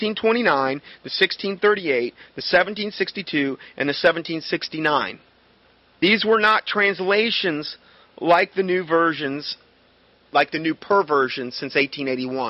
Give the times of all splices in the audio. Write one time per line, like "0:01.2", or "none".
none